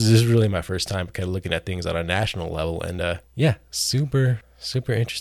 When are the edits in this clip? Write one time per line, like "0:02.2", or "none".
none